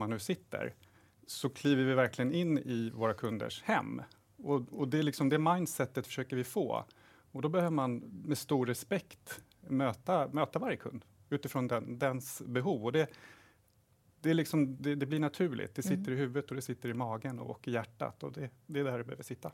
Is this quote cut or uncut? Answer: uncut